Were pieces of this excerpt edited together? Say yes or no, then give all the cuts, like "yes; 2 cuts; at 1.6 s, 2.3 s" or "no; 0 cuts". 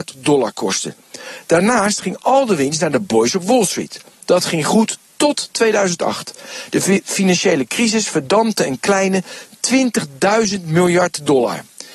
no; 0 cuts